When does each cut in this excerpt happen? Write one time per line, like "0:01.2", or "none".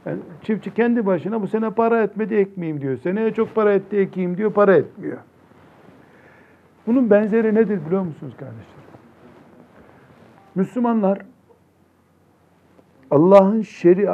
0:06.8